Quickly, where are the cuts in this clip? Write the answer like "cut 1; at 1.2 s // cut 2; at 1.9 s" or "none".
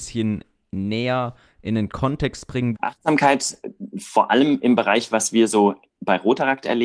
cut 1; at 2.7 s